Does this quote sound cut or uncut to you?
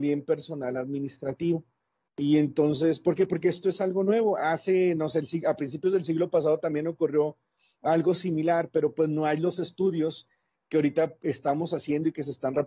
uncut